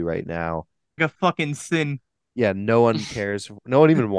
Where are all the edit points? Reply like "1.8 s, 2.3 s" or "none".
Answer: 1.0 s